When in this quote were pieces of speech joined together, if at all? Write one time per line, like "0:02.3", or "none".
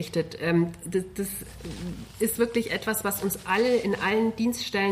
none